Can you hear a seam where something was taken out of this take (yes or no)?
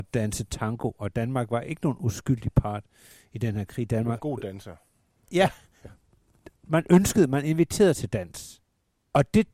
no